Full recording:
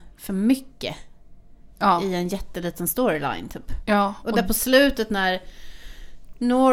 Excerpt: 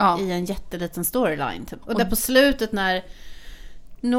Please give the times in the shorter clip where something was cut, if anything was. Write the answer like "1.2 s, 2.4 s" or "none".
1.8 s